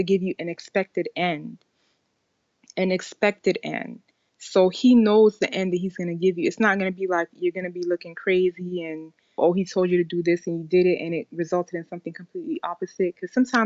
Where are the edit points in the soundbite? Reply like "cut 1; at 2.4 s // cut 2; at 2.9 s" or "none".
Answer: cut 1; at 9.4 s